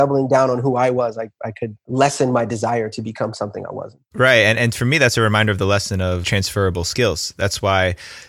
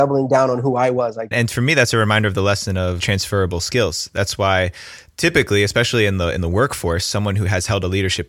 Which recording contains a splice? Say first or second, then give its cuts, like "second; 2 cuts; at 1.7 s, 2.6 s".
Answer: second; 1 cut; at 1.3 s